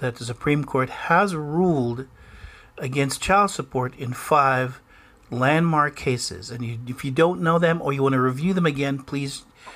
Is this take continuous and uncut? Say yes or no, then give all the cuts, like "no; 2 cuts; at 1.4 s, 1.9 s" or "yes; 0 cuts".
yes; 0 cuts